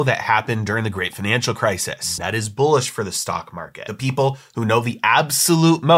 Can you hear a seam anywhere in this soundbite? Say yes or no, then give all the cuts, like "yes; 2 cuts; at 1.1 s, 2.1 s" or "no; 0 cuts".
yes; 1 cut; at 2.2 s